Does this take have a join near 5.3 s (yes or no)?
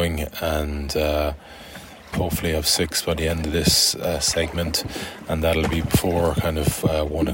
no